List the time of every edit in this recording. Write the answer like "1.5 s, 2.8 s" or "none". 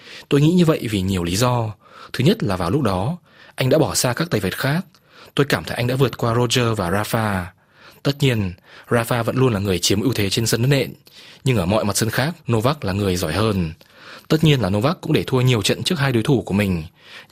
12.4 s